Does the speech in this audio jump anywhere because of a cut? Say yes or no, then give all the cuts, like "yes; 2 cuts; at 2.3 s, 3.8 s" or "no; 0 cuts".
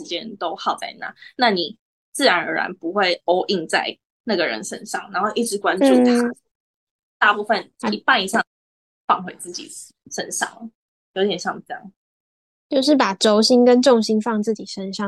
no; 0 cuts